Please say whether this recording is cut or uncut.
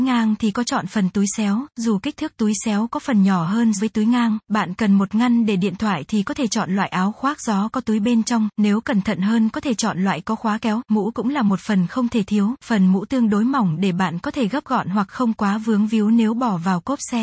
cut